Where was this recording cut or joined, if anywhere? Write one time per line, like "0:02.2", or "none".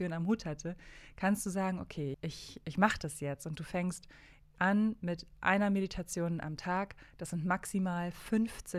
0:02.1